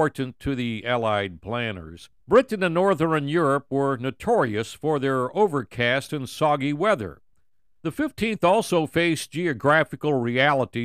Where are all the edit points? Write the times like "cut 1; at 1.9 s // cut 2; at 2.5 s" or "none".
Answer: cut 1; at 2.2 s // cut 2; at 7.8 s